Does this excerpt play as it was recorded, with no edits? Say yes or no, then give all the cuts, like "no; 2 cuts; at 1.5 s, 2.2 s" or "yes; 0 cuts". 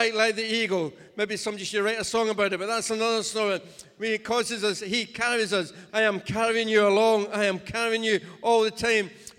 no; 1 cut; at 5.9 s